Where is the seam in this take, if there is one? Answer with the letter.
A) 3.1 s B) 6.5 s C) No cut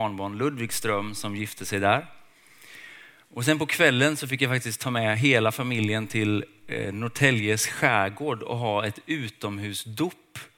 C